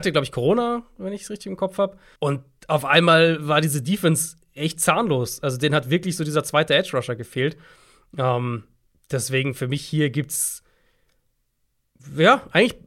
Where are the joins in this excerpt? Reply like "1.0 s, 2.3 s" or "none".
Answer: 2.2 s